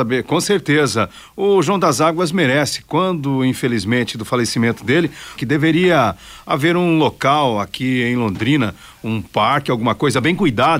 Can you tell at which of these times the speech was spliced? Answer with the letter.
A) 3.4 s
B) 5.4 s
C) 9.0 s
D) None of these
B